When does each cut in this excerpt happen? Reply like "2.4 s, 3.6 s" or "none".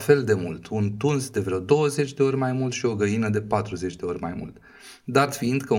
none